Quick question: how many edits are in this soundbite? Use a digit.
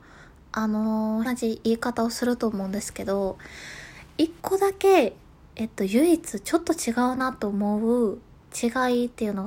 2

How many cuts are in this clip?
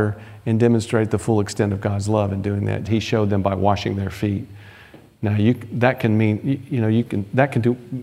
1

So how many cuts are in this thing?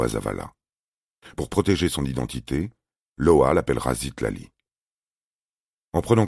0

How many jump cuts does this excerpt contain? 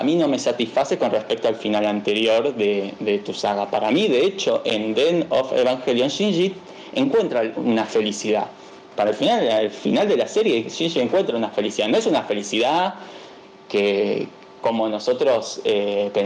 1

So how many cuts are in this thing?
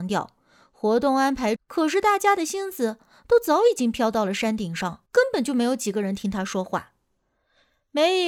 2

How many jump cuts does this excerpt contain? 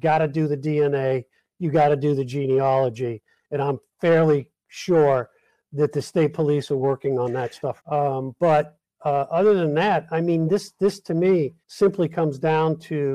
2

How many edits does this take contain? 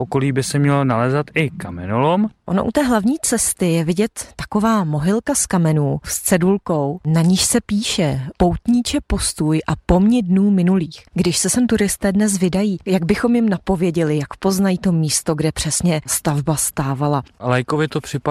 1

